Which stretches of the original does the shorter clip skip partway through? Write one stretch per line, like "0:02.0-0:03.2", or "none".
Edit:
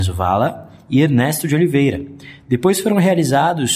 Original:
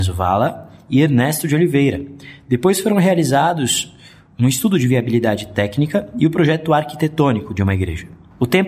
none